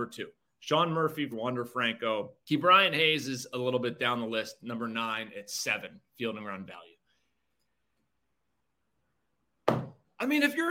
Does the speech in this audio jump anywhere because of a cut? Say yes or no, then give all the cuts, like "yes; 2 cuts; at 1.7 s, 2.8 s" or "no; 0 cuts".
yes; 2 cuts; at 1.3 s, 2.4 s